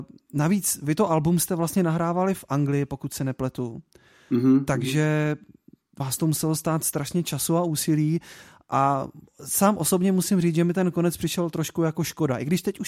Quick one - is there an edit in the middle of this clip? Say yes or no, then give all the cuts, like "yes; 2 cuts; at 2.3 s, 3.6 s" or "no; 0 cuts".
no; 0 cuts